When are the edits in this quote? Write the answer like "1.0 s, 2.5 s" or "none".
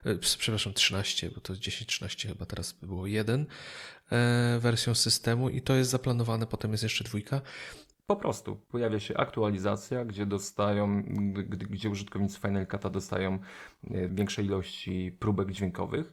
7.9 s, 14.1 s